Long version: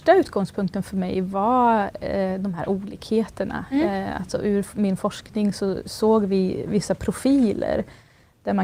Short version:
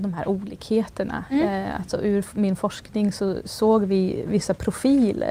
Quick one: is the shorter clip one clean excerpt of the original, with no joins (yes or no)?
yes